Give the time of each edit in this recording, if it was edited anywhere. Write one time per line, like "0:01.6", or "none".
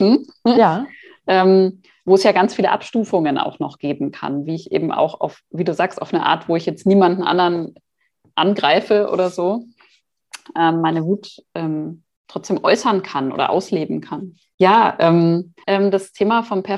0:14.5
0:15.6